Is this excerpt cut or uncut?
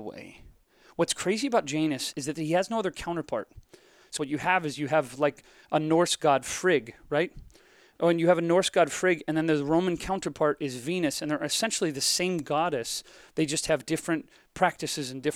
cut